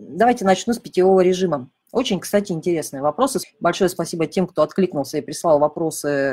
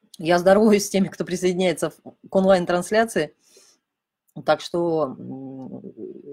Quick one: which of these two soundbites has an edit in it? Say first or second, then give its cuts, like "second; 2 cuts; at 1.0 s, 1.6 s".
first; 2 cuts; at 1.8 s, 3.4 s